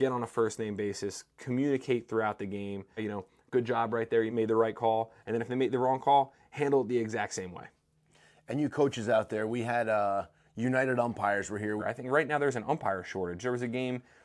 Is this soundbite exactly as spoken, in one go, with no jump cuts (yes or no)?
no